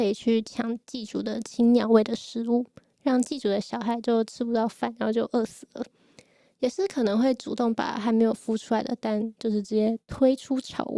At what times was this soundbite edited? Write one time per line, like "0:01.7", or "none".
none